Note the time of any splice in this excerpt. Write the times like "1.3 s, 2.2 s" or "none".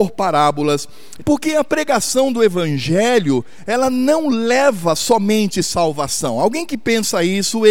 1.2 s